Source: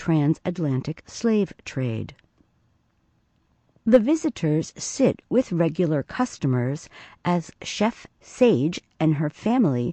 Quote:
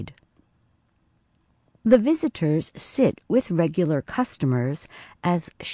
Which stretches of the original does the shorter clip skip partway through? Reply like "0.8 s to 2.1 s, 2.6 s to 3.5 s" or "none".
none

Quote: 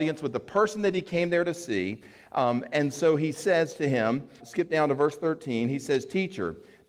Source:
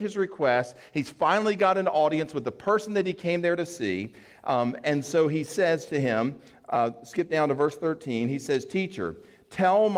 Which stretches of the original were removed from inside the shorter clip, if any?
6.5 s to 7.0 s

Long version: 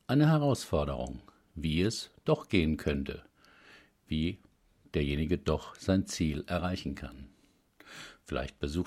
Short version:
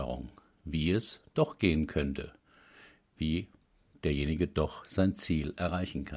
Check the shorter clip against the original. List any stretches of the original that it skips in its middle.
none

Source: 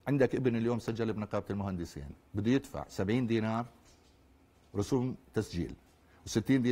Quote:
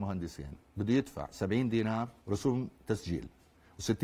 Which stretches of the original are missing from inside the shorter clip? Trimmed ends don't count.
3.8 s to 4.7 s

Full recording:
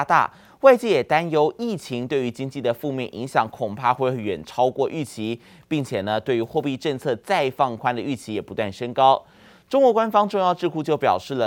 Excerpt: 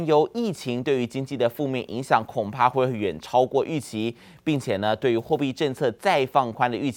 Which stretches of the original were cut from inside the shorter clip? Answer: none

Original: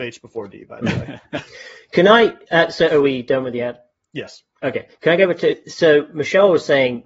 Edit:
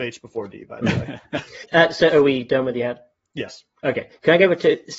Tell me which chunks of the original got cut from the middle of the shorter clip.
1.6 s to 2.4 s

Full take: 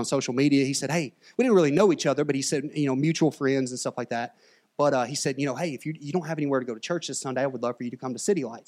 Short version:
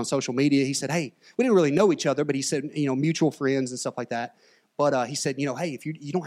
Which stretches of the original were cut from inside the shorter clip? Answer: none

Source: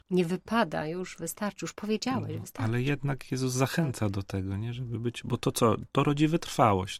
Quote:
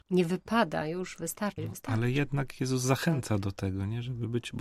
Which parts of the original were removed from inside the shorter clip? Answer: 1.6 s to 2.3 s

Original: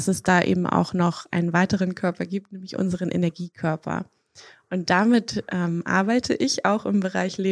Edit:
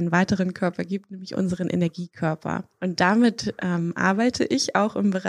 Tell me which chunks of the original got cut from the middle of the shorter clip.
4.1 s to 4.6 s

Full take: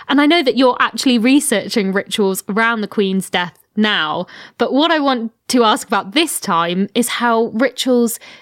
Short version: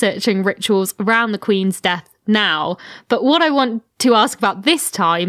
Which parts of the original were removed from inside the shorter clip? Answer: none

